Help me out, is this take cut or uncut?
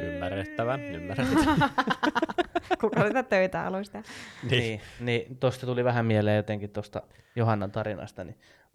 uncut